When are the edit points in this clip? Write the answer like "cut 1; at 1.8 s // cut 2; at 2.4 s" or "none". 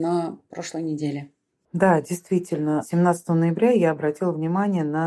none